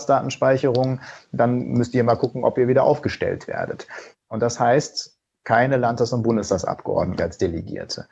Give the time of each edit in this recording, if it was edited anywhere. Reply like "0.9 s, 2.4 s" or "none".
4.2 s, 7.2 s